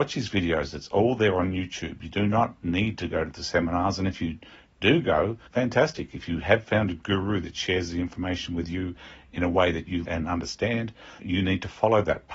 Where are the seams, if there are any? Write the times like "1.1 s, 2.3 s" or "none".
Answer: 5.5 s, 10.0 s, 11.2 s

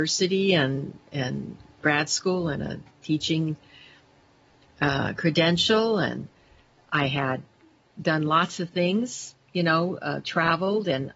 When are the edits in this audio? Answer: none

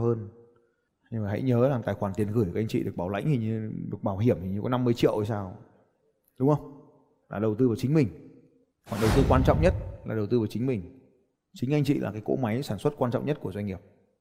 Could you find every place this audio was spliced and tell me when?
7.2 s

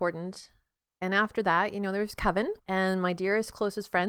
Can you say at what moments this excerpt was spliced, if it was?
2.6 s

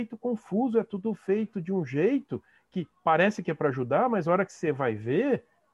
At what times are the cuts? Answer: 2.9 s

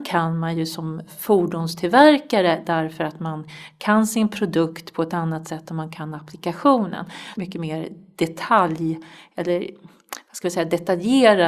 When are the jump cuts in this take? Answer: 7.3 s

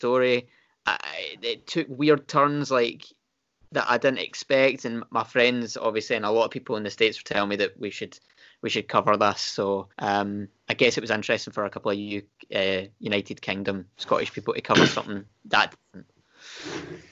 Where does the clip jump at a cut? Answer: 9.9 s

